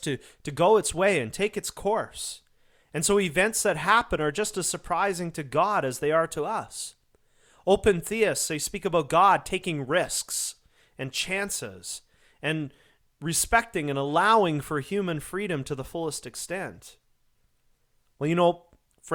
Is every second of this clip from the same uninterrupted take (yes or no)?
yes